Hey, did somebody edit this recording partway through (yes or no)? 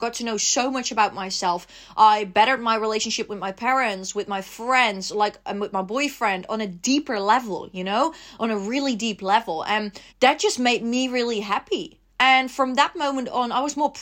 yes